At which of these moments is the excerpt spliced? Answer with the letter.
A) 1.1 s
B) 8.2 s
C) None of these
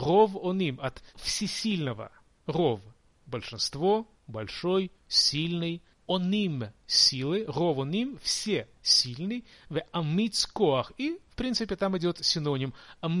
A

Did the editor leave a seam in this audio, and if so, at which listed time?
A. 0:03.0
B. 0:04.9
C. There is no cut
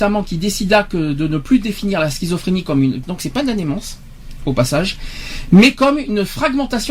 A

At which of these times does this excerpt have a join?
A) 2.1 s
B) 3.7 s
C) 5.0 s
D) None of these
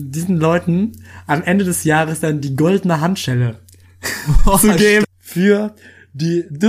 C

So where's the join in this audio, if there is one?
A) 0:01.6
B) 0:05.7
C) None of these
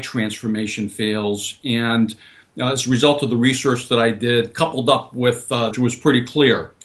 B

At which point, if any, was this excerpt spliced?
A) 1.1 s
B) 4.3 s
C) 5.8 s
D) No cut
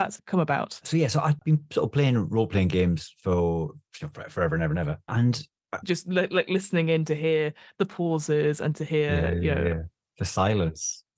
C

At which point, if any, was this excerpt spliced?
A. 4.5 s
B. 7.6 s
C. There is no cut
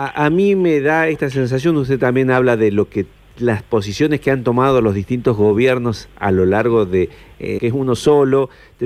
B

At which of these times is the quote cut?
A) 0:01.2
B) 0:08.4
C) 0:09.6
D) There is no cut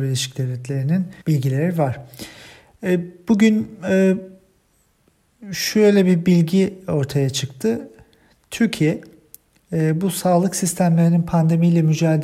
A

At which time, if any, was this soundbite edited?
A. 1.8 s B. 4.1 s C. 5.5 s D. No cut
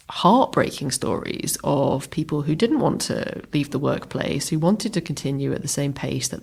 D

